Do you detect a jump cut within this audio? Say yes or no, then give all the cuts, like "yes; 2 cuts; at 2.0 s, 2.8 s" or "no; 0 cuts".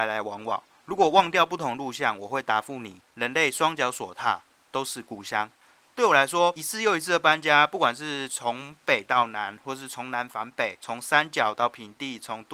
no; 0 cuts